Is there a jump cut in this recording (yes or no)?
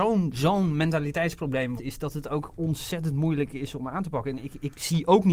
yes